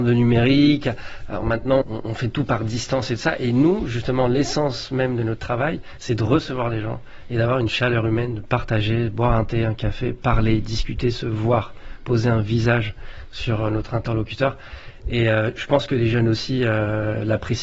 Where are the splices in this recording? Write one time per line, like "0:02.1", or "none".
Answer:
0:01.8

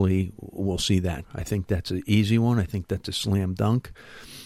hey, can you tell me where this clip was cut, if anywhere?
0:01.2

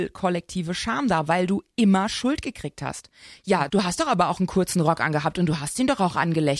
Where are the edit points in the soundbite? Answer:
none

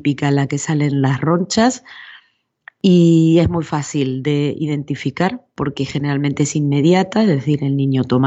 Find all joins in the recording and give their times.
none

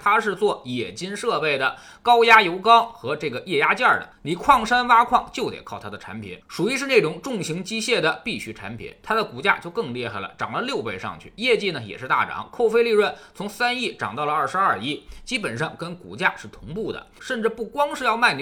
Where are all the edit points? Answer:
0:17.2

